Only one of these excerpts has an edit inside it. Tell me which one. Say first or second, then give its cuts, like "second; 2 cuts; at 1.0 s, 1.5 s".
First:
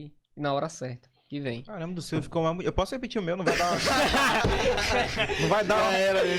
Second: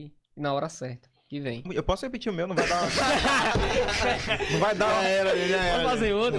second; 1 cut; at 1.6 s